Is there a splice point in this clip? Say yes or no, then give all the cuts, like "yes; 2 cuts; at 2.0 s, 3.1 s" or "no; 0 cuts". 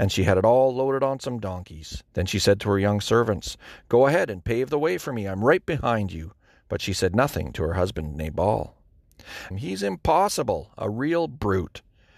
yes; 2 cuts; at 2.1 s, 9.5 s